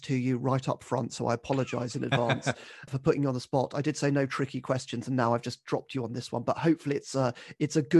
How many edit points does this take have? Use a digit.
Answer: 1